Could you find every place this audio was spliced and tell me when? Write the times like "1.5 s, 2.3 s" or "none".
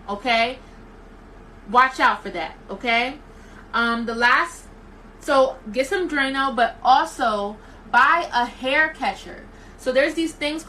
none